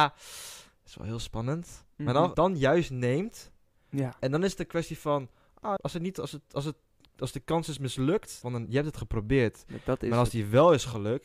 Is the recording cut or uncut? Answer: cut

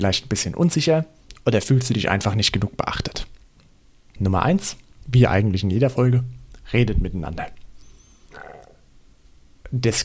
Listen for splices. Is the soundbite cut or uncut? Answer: cut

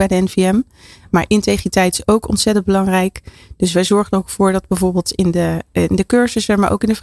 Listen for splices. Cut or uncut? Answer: uncut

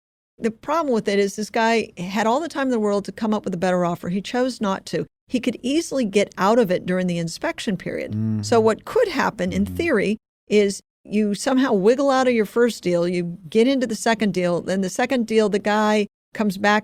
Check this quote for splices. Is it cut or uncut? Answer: uncut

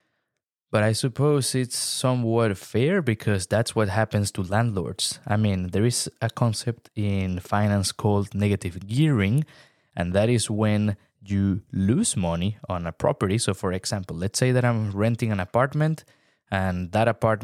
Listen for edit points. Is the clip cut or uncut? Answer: uncut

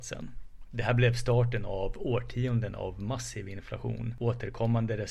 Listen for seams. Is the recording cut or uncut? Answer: uncut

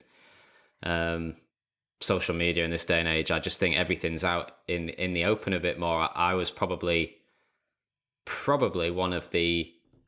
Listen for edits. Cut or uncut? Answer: uncut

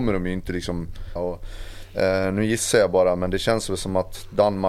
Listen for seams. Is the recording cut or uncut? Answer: cut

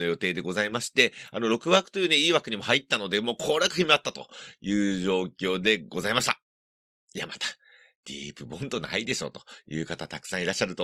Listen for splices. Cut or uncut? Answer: uncut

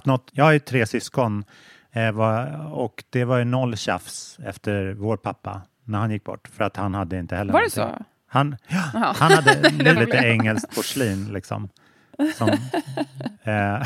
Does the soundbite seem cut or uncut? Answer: cut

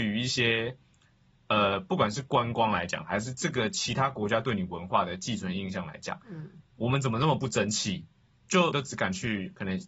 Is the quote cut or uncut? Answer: cut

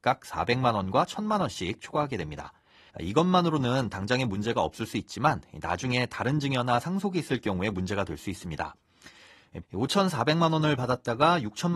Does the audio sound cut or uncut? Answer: cut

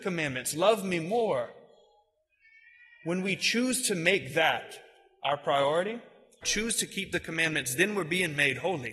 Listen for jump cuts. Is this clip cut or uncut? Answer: cut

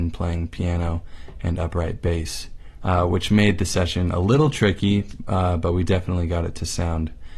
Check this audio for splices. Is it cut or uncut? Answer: cut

